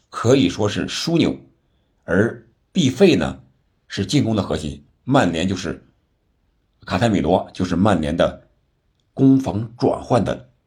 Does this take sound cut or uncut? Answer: uncut